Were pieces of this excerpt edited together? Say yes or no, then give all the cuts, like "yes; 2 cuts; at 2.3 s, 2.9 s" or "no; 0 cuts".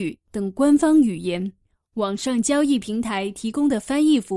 no; 0 cuts